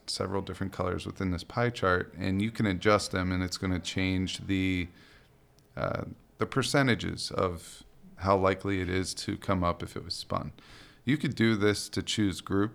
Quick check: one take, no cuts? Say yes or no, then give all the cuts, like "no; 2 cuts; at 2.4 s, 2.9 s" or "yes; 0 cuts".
yes; 0 cuts